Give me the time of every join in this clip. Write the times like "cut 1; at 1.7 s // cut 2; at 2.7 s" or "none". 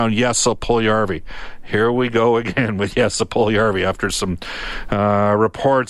none